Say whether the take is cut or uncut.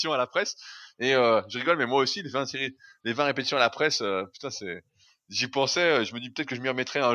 uncut